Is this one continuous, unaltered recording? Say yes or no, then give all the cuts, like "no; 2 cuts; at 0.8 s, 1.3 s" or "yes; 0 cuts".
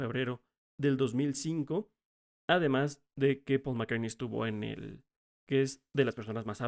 no; 2 cuts; at 2.4 s, 5.2 s